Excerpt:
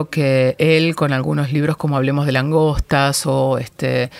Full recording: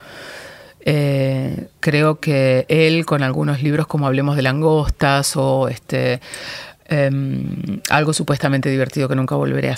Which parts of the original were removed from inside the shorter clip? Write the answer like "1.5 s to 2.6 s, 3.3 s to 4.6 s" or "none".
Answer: none